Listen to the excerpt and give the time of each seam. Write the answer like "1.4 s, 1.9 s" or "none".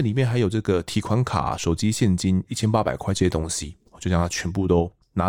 1.6 s